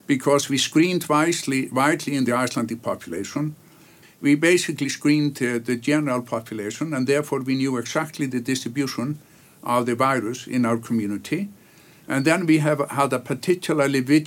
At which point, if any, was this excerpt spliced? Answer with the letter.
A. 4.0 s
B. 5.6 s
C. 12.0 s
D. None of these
A